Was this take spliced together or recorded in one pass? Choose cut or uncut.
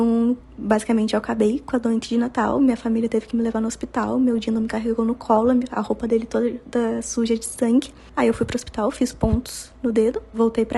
uncut